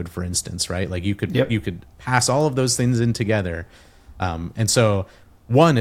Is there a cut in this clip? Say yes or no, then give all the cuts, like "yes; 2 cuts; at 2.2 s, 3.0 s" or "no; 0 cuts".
no; 0 cuts